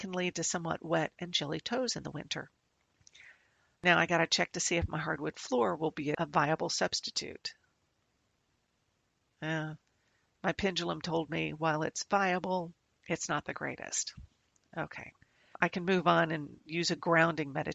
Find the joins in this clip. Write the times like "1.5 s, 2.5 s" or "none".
none